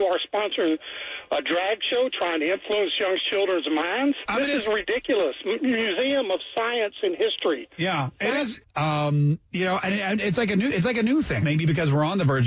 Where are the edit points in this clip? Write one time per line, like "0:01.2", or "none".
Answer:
0:04.3
0:08.6
0:11.4